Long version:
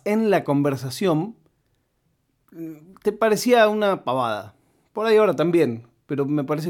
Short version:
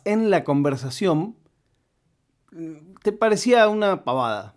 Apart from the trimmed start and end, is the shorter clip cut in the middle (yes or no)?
no